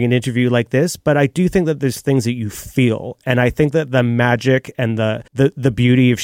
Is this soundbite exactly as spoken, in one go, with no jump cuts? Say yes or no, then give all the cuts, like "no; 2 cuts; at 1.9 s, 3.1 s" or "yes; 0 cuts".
no; 1 cut; at 5.3 s